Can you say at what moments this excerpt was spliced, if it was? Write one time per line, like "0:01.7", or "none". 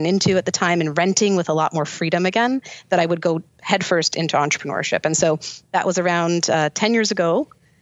none